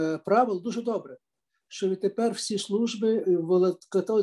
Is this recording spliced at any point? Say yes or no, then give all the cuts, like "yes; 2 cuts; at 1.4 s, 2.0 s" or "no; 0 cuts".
no; 0 cuts